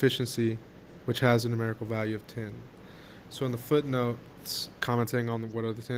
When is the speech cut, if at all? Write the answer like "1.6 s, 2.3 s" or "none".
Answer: 1.0 s, 4.8 s